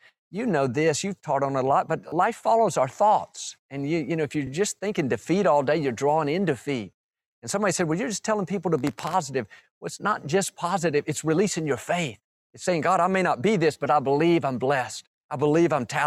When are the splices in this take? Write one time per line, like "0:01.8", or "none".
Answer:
none